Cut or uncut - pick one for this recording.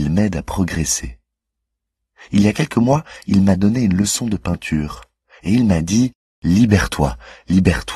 uncut